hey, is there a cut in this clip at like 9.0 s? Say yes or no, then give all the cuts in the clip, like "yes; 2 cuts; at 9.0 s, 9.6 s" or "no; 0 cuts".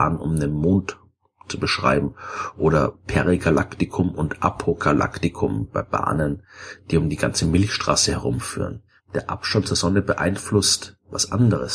yes; 1 cut; at 9.0 s